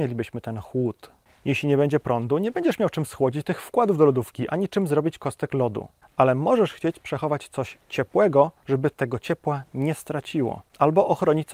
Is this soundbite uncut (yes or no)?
yes